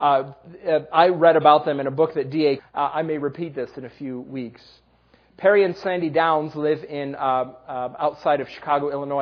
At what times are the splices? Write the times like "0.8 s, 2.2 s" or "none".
2.6 s